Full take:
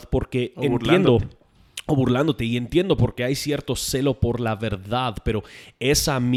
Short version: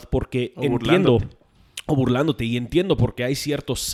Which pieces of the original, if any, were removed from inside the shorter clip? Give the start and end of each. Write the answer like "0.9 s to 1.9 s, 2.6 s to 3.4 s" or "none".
none